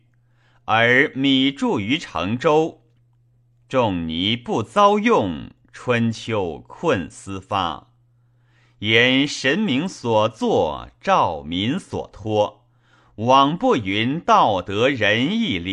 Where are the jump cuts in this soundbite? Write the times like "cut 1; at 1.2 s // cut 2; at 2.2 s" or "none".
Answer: none

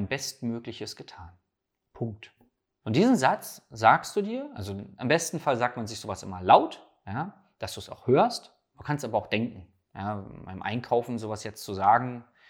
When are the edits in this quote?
none

